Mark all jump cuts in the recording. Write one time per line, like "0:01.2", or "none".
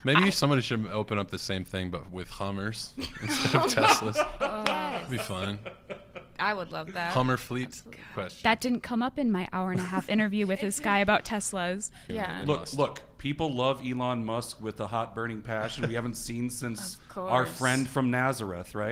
0:08.1